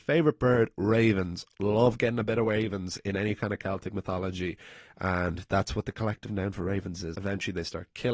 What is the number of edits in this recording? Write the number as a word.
one